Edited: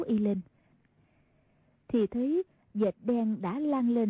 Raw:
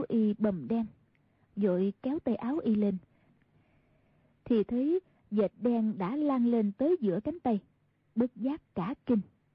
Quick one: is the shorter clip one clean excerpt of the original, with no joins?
yes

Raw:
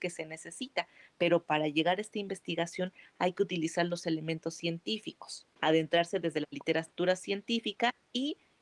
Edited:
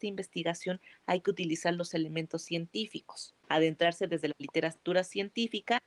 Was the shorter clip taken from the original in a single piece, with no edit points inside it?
yes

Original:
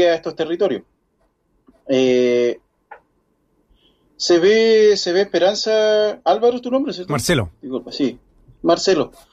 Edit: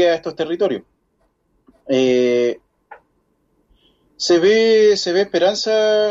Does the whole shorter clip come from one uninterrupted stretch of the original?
yes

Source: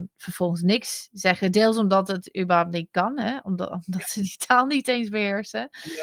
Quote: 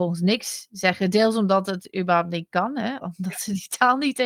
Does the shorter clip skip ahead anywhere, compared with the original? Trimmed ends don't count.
yes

